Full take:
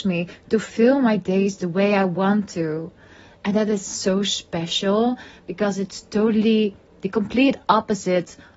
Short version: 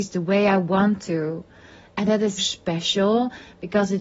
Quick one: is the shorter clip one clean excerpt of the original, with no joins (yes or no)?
no